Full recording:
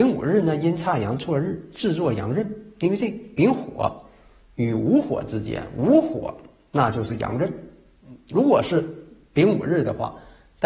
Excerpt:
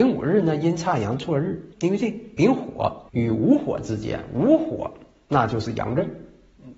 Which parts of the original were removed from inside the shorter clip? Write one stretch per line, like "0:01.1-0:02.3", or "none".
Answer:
0:01.7-0:02.7
0:04.1-0:04.5